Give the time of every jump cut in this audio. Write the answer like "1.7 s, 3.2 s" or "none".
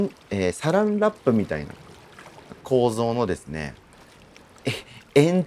2.6 s